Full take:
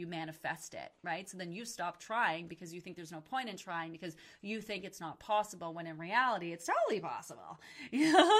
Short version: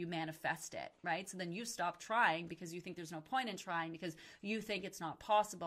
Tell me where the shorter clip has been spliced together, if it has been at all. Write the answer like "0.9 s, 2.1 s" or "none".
none

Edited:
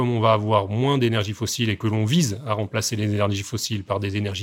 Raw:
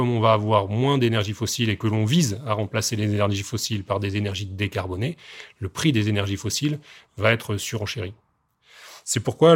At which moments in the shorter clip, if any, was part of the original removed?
none

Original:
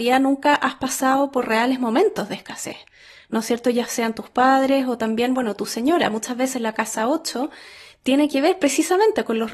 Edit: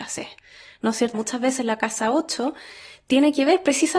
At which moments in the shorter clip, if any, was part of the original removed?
1.1 s

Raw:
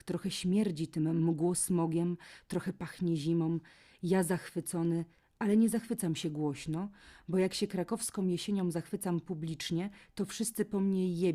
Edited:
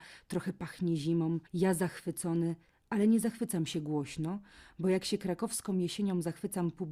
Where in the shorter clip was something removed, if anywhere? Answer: 1.5 s

